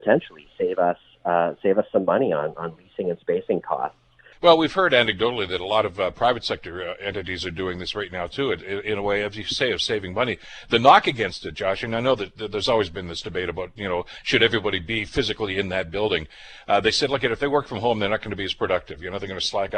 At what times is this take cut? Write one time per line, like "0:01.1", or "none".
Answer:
0:04.3